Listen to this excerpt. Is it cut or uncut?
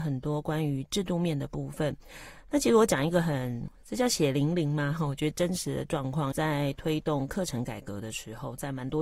cut